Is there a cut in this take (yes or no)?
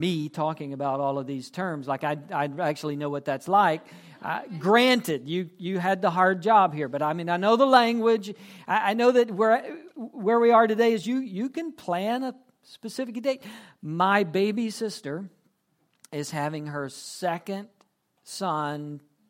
no